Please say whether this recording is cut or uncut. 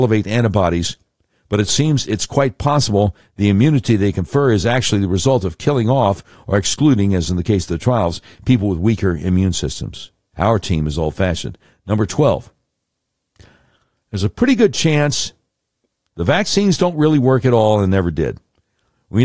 cut